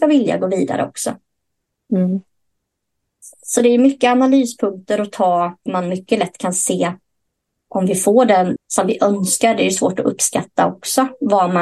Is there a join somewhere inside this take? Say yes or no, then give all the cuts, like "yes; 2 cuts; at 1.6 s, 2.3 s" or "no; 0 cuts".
yes; 2 cuts; at 5.7 s, 8.6 s